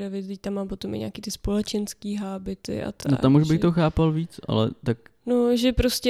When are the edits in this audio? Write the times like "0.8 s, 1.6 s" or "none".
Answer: none